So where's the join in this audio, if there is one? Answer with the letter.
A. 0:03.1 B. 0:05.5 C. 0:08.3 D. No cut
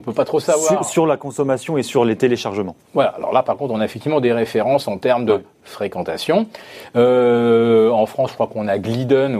D